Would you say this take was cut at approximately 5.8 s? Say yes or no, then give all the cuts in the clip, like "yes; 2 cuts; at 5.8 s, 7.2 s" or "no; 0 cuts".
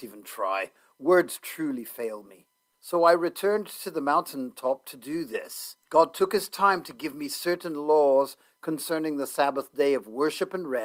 yes; 2 cuts; at 2.7 s, 5.8 s